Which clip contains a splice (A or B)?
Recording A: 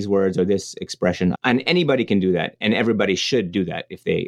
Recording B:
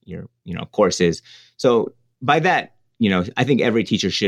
A